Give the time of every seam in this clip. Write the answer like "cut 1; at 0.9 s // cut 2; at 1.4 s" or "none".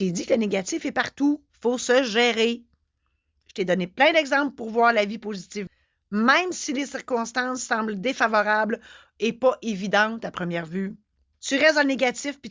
cut 1; at 1.5 s // cut 2; at 11.3 s